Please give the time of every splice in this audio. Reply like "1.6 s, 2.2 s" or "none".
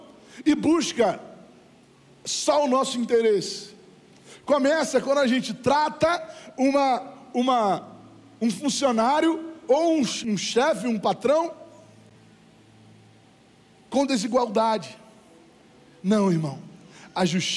10.2 s

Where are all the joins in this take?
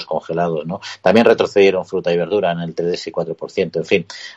none

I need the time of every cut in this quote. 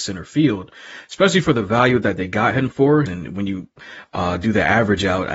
3.1 s

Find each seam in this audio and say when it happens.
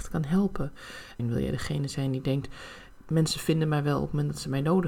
1.2 s

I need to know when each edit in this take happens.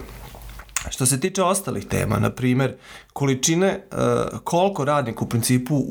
none

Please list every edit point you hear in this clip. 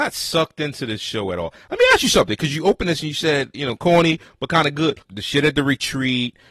3.5 s, 5.0 s

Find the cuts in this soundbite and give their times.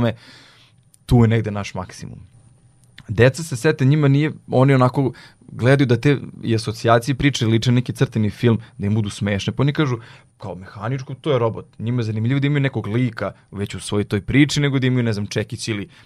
10.4 s

